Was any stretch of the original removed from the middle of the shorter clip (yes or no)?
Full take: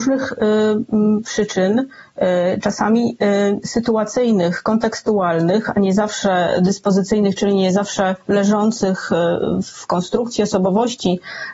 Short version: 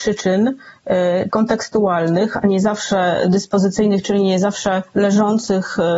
yes